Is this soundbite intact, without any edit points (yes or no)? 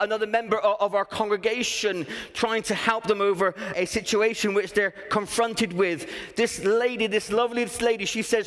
no